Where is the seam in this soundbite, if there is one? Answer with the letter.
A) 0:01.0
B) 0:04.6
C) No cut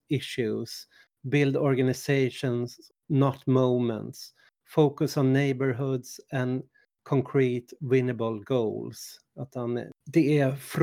A